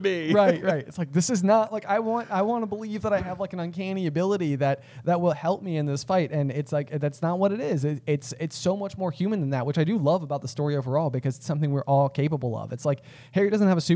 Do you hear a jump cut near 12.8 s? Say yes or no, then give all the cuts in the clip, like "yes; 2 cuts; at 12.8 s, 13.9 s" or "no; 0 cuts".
no; 0 cuts